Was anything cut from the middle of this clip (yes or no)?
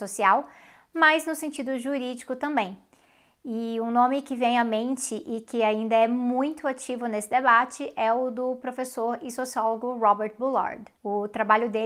yes